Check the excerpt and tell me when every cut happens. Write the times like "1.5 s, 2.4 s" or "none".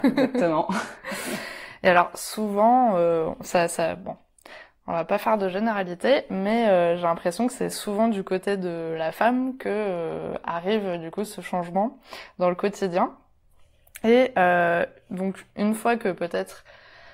none